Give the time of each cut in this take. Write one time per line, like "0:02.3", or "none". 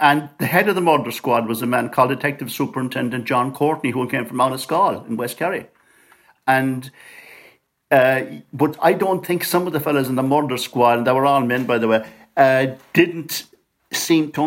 none